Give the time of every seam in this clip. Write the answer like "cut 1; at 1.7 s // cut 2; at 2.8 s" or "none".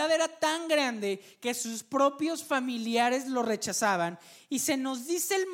none